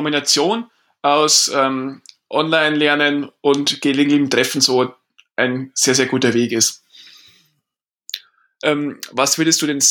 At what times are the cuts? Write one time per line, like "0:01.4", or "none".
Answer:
0:08.6